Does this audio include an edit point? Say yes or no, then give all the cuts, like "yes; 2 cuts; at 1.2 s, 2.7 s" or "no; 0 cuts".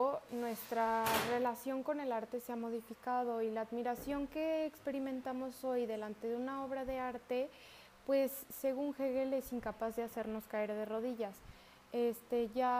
no; 0 cuts